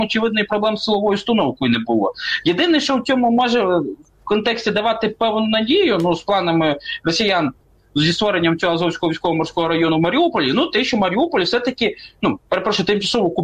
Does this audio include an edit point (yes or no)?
no